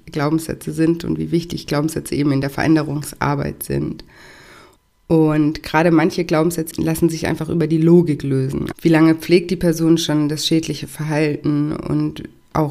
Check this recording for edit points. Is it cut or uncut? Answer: cut